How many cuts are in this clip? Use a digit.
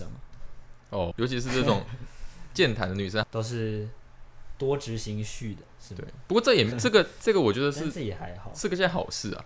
3